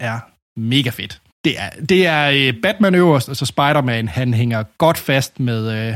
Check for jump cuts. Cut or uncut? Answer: cut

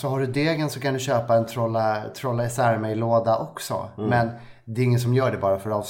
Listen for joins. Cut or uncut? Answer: uncut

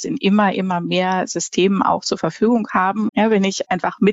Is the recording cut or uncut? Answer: cut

